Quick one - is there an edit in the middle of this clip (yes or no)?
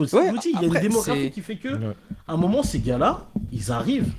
no